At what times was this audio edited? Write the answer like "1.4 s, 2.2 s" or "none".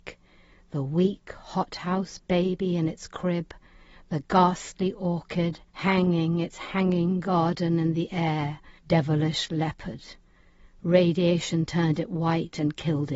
5.7 s, 8.8 s